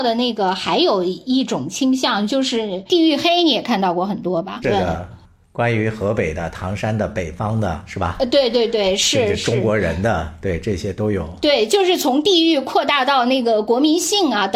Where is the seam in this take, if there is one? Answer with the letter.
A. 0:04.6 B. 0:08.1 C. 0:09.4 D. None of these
A